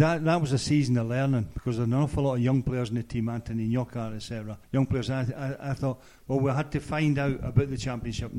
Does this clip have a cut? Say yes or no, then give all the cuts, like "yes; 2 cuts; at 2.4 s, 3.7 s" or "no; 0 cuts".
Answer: yes; 1 cut; at 4.6 s